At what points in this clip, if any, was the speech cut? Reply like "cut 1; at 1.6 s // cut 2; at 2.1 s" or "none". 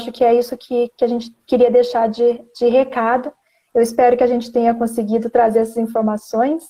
none